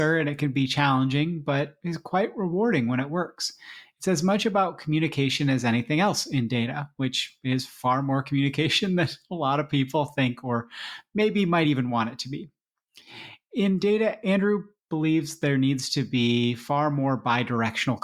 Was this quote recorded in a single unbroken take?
yes; 0 cuts

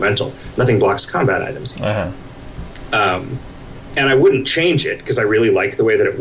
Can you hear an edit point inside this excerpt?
yes; 1 cut; at 1.7 s

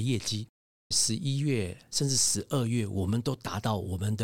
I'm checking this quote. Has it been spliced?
yes; 1 cut; at 0.9 s

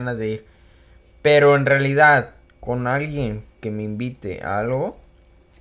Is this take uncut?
yes; 0 cuts

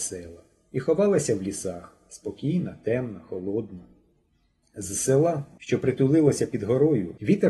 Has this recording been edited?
no; 0 cuts

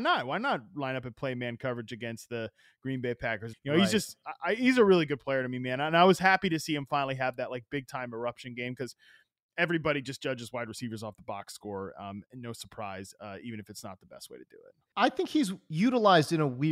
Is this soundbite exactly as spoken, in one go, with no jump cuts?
no; 1 cut; at 3.5 s

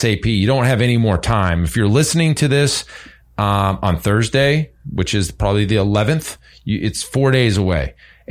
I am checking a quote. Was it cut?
no; 0 cuts

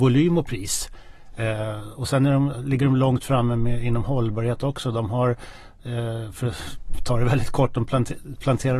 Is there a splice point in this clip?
no; 0 cuts

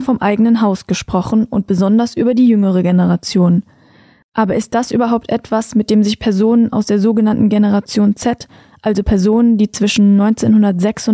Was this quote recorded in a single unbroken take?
yes; 0 cuts

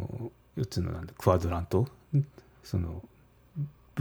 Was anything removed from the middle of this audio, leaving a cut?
no; 0 cuts

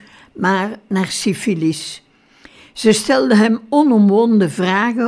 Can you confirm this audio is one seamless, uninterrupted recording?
yes; 0 cuts

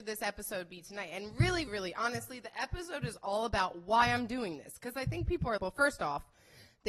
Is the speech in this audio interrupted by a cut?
yes; 2 cuts; at 1.7 s, 5.6 s

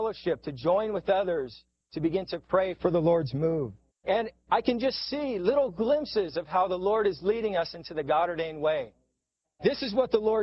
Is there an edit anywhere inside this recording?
yes; 2 cuts; at 3.9 s, 9.4 s

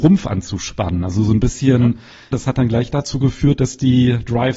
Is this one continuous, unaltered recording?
no; 1 cut; at 2.3 s

